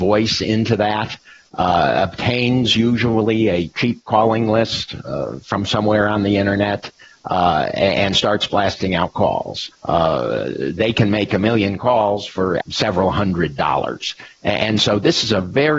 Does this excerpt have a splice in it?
yes; 2 cuts; at 9.7 s, 12.6 s

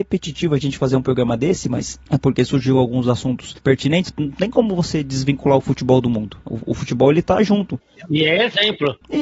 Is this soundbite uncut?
no; 1 cut; at 4.1 s

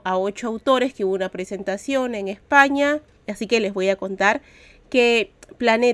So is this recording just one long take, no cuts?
no; 1 cut; at 3.2 s

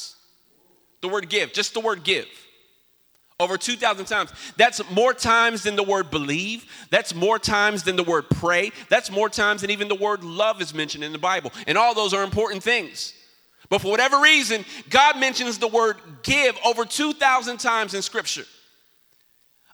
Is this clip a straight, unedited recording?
yes; 0 cuts

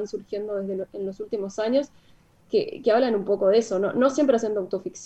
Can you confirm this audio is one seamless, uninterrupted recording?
yes; 0 cuts

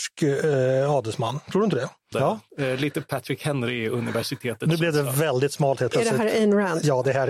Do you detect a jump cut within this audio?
yes; 1 cut; at 2.1 s

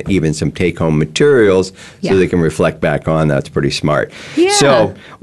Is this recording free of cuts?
yes; 0 cuts

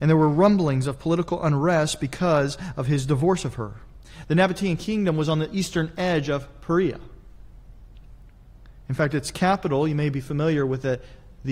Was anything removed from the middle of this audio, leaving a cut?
no; 0 cuts

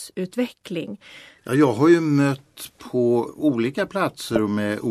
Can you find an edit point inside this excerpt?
yes; 2 cuts; at 1.4 s, 3.3 s

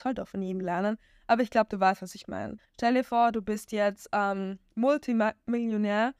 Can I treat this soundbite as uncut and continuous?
yes; 0 cuts

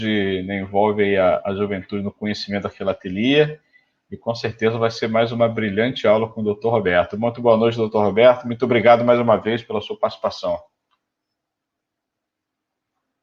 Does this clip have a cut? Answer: no; 0 cuts

